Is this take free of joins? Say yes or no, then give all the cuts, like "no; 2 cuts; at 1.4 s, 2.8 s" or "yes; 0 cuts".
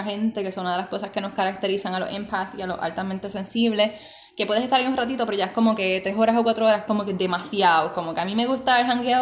yes; 0 cuts